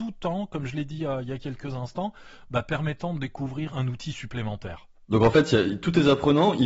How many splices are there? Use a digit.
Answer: 2